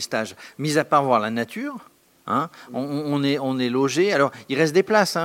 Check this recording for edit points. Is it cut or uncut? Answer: uncut